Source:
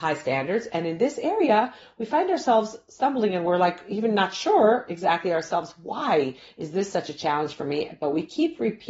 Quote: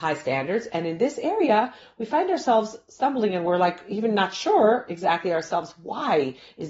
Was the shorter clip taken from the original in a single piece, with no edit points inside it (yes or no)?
yes